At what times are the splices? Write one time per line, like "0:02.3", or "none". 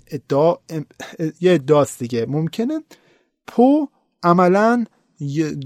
none